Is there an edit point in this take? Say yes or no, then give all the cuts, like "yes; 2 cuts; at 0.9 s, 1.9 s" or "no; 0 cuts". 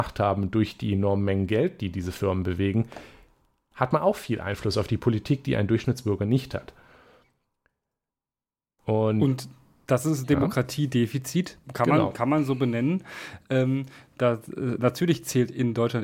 yes; 1 cut; at 11.6 s